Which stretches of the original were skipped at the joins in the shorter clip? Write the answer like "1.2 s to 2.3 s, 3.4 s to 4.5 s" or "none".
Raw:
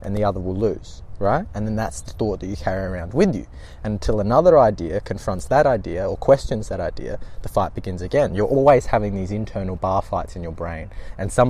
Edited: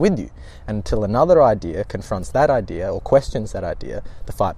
none

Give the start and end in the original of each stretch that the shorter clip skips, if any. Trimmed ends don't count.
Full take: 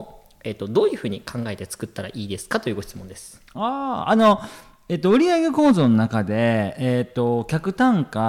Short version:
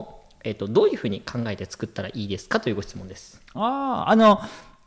none

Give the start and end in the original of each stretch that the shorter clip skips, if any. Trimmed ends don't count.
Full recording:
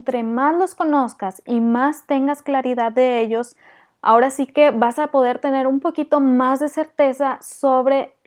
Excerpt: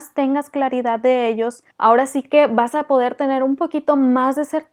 3.6 s to 3.9 s

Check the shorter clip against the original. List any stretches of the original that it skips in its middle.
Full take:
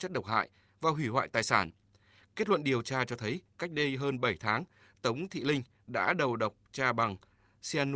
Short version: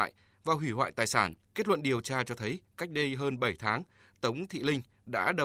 1.8 s to 2.2 s

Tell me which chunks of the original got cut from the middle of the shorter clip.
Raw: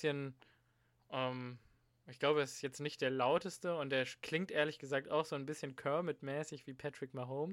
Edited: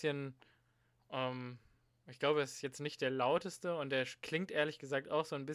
none

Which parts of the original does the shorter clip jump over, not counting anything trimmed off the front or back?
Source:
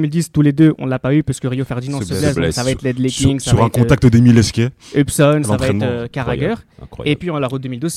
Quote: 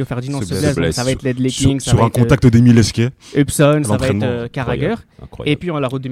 none

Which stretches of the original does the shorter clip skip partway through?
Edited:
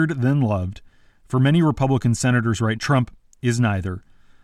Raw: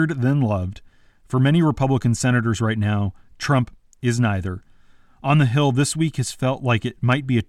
2.7 s to 3.3 s

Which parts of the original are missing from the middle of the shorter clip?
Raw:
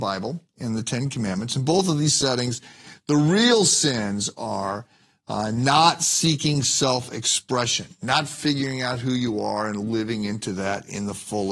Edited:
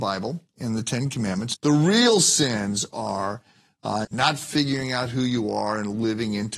1.5 s to 3.0 s, 5.5 s to 7.9 s

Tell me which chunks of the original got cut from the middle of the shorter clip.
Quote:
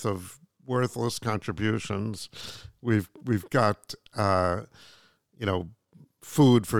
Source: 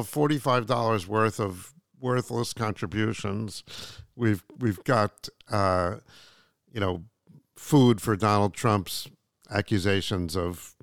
none

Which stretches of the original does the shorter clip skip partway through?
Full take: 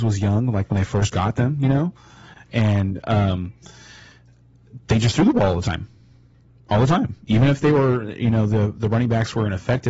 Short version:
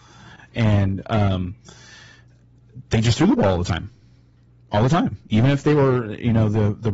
none

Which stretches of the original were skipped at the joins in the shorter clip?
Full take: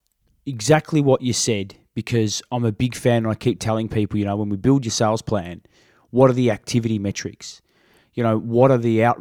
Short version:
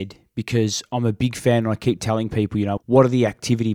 4.4 s to 6.0 s

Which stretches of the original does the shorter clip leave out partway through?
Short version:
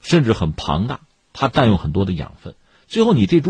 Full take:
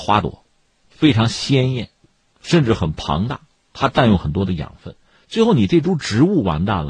none

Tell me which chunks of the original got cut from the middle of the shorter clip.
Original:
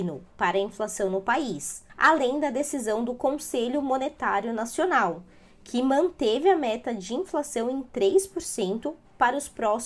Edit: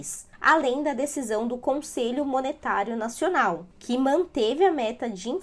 5.3 s to 5.6 s

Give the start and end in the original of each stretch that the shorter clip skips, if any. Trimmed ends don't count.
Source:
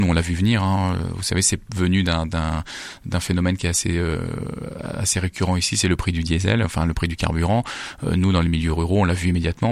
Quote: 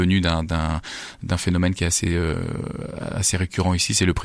none

